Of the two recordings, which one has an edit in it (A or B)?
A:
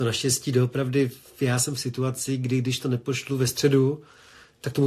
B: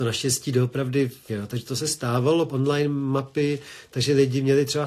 B